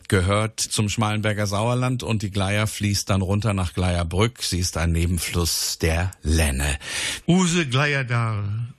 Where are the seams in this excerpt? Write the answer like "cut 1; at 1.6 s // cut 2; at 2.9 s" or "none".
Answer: cut 1; at 7.2 s